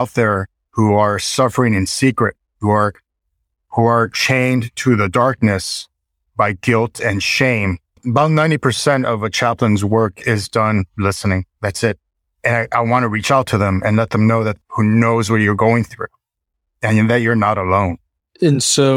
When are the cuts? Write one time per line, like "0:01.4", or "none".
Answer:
0:08.0
0:12.4
0:14.6